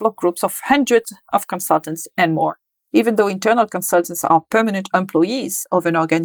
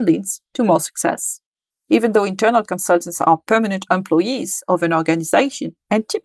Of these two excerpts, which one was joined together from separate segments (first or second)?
second